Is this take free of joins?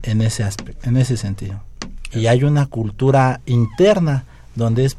no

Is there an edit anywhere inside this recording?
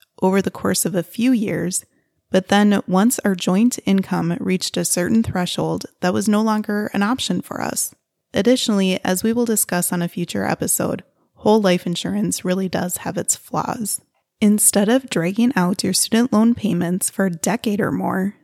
no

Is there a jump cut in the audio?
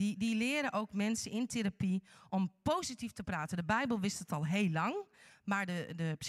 no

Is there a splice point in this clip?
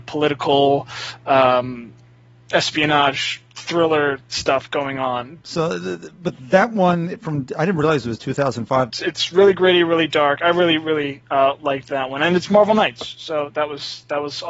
yes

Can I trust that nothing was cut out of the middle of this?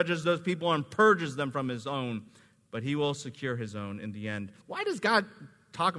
no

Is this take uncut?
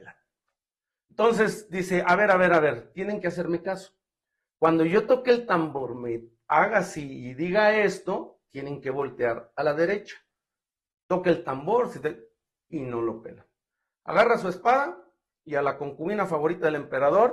yes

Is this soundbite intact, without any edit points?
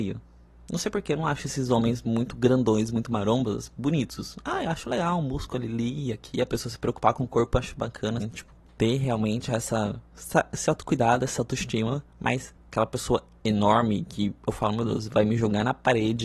no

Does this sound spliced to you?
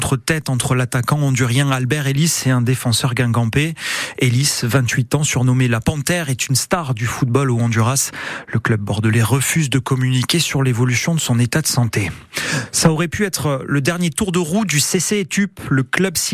no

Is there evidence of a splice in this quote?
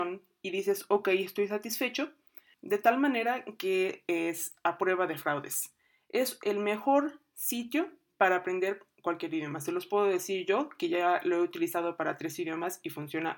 yes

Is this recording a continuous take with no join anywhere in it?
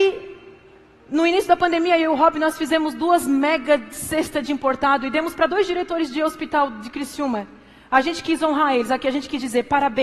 yes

